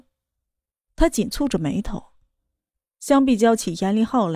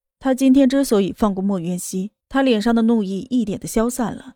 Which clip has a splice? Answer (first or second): second